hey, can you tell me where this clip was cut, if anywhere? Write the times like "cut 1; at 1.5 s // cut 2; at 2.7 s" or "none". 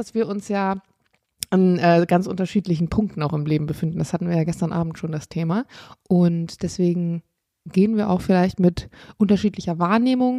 none